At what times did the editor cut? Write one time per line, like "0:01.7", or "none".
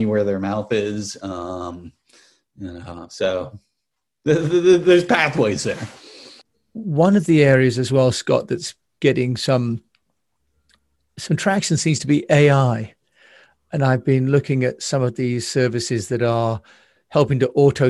none